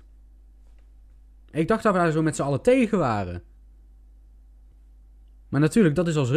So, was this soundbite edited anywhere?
yes; 1 cut; at 1.5 s

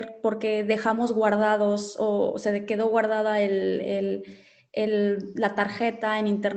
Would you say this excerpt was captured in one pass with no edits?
yes; 0 cuts

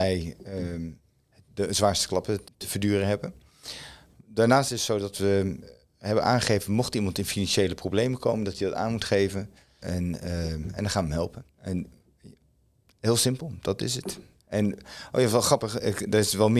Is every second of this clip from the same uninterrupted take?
no; 3 cuts; at 2.4 s, 9.8 s, 11.5 s

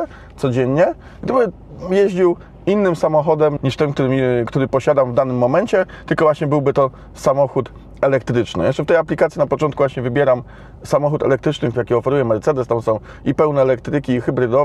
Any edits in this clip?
yes; 2 cuts; at 3.6 s, 11.7 s

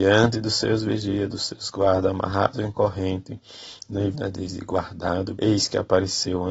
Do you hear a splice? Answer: yes; 2 cuts; at 4.1 s, 5.3 s

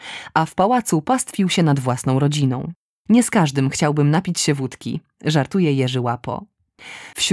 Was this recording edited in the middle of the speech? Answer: yes; 1 cut; at 3.1 s

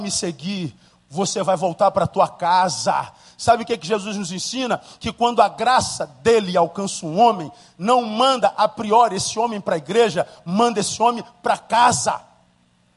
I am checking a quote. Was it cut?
no; 0 cuts

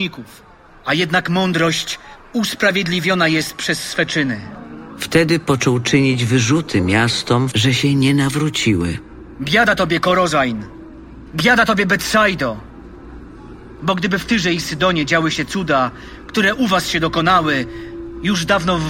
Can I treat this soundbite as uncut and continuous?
no; 1 cut; at 7.5 s

